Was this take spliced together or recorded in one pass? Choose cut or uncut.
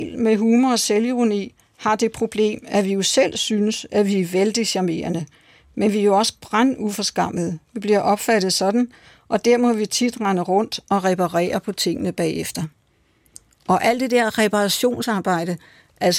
uncut